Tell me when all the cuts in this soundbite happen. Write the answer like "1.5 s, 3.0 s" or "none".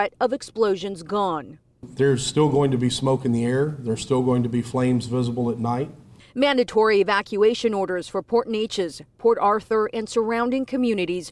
none